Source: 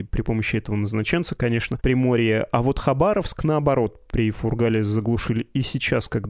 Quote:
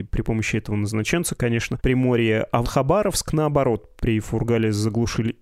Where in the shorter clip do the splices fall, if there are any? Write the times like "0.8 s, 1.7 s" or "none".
2.6 s